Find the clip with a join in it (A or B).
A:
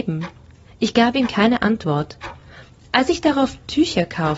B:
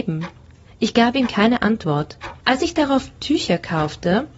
B